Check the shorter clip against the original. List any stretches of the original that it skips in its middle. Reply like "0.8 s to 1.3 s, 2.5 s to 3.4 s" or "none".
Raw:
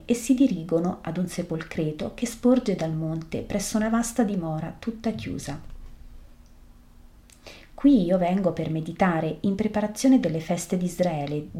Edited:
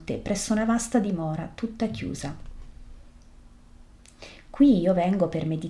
none